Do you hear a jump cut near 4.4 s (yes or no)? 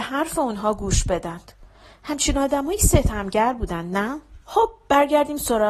yes